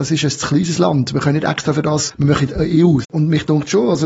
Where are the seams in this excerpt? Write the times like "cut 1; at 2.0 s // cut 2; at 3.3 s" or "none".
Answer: cut 1; at 3.0 s